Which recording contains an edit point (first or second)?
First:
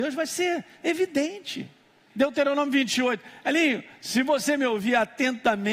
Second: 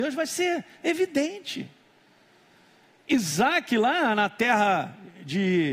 first